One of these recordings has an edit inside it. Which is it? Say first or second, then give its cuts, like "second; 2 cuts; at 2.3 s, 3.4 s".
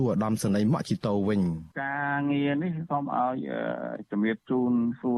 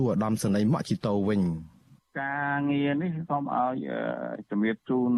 first; 1 cut; at 1.7 s